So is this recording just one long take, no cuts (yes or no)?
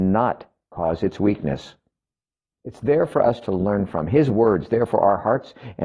no